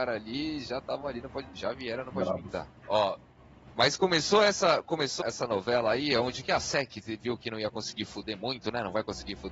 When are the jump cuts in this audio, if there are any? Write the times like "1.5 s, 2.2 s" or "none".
2.8 s, 5.2 s

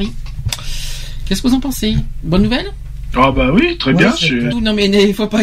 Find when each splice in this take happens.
4.5 s

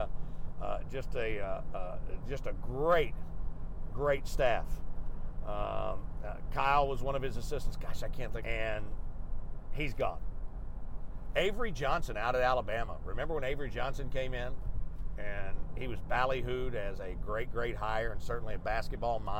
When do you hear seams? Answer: 8.4 s

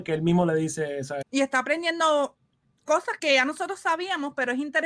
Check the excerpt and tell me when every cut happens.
1.2 s, 3.2 s

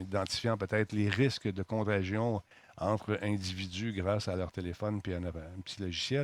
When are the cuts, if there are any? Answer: none

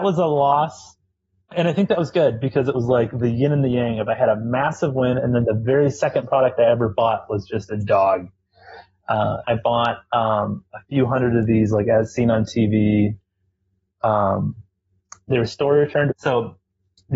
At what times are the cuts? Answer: 9.4 s, 16.1 s

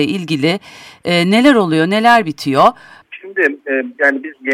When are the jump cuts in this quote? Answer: 3.0 s

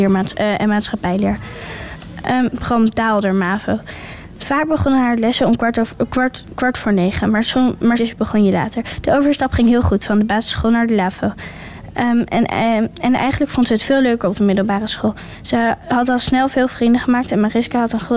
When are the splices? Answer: 2.5 s, 8.0 s

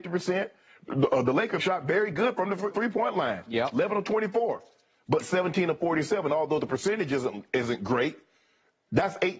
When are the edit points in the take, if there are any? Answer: 1.6 s, 2.7 s

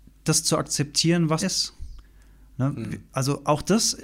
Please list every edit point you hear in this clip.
1.4 s

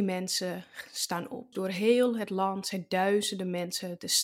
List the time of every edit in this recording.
1.5 s

